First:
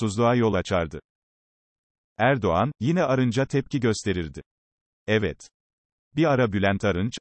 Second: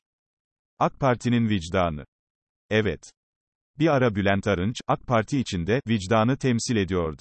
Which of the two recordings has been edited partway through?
first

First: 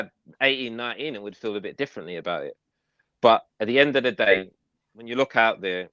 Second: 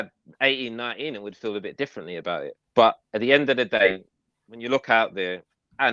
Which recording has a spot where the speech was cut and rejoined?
second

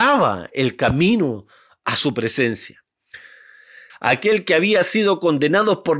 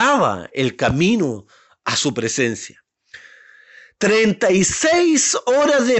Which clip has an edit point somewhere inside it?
first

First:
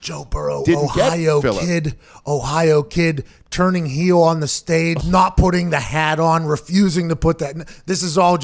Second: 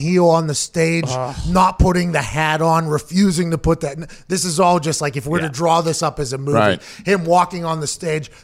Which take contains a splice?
first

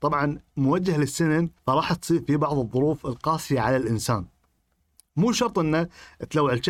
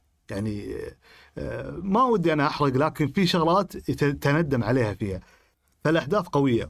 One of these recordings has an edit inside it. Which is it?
first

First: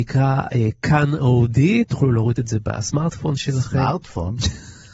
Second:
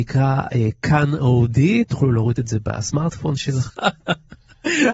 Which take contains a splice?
second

